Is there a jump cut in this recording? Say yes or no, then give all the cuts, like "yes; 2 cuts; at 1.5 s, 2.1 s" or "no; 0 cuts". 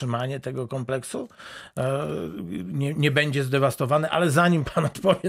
no; 0 cuts